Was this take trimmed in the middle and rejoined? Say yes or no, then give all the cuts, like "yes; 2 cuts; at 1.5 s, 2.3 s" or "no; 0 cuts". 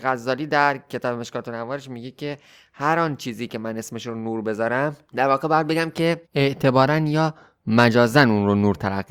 yes; 1 cut; at 6.3 s